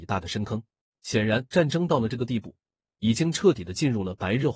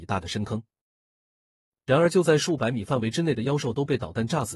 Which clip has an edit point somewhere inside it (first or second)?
first